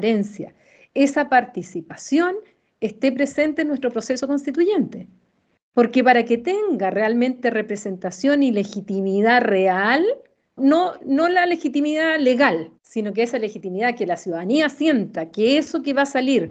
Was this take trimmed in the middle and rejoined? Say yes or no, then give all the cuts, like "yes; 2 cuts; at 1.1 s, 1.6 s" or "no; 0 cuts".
yes; 2 cuts; at 10.6 s, 12.8 s